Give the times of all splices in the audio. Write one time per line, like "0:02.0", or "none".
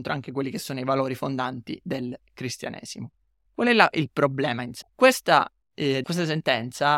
0:04.8
0:06.0